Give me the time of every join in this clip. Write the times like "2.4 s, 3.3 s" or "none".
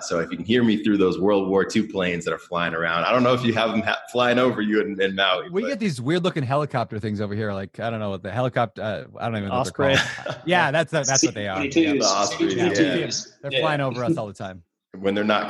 none